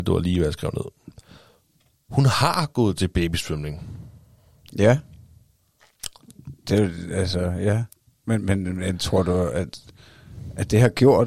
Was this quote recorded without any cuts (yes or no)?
yes